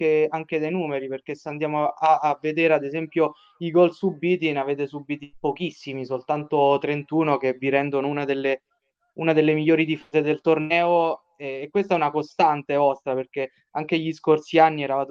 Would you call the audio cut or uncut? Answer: uncut